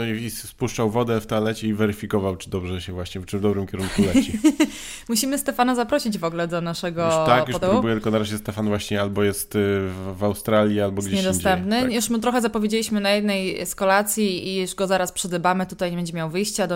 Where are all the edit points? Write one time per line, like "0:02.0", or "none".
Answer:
0:07.6